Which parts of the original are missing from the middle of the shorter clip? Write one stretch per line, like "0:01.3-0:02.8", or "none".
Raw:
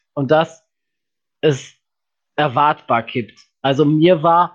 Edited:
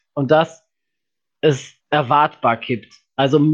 0:01.8-0:02.3